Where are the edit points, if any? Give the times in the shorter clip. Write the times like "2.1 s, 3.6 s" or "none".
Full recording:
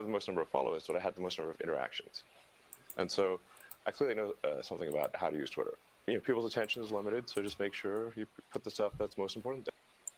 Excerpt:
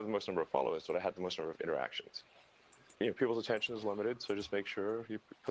2.9 s